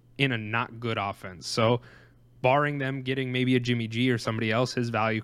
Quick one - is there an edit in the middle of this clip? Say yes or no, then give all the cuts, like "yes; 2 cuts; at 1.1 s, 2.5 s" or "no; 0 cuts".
no; 0 cuts